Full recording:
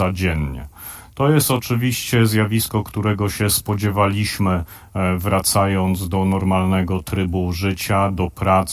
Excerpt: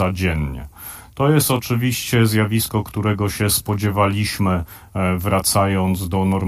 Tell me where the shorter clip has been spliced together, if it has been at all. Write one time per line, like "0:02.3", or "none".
none